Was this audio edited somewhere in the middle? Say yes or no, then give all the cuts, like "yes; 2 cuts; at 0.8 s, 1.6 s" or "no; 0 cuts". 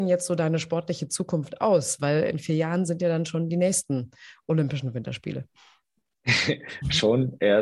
no; 0 cuts